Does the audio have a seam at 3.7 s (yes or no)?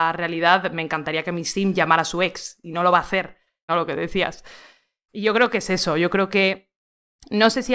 yes